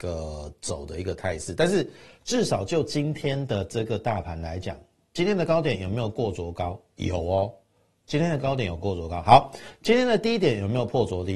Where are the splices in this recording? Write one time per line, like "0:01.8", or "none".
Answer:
none